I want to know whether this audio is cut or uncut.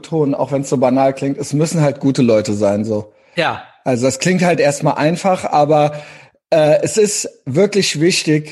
uncut